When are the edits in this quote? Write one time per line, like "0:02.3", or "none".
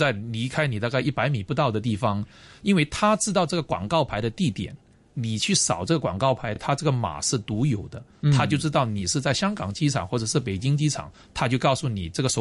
none